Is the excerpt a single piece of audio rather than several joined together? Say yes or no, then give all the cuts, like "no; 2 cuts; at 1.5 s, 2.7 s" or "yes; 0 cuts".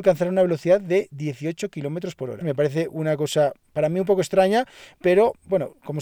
no; 2 cuts; at 2.4 s, 3.6 s